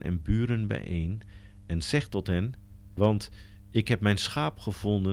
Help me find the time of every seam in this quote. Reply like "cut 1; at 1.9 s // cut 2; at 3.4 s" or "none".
cut 1; at 3.0 s